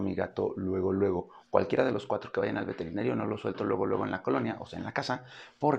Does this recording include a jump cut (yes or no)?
no